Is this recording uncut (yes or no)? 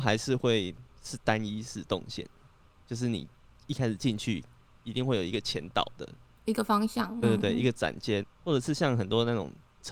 no